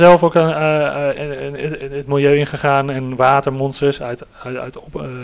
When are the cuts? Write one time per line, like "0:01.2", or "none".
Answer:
none